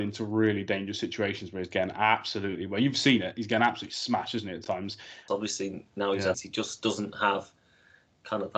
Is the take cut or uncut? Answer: cut